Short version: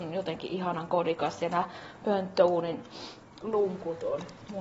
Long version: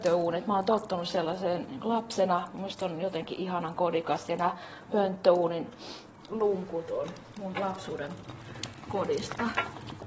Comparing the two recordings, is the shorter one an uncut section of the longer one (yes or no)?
yes